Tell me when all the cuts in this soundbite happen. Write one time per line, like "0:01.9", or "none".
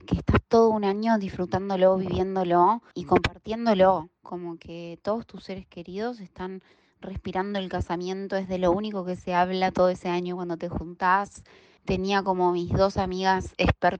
0:02.9
0:11.8